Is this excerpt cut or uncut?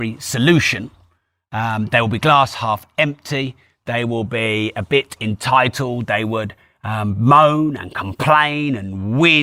uncut